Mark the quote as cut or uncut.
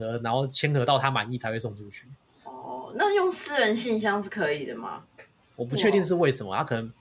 cut